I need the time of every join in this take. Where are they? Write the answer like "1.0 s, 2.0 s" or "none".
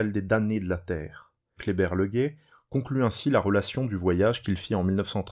1.6 s